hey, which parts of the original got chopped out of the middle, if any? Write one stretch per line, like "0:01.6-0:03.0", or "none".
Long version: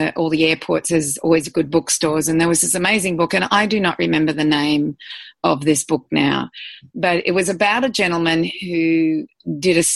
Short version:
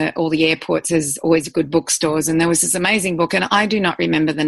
none